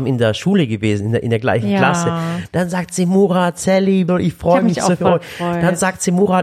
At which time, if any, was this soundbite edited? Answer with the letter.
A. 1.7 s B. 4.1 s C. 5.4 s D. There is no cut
B